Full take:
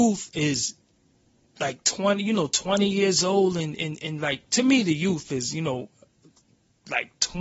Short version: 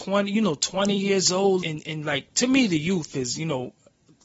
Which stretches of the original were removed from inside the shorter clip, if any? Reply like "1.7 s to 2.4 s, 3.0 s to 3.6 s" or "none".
3.5 s to 3.8 s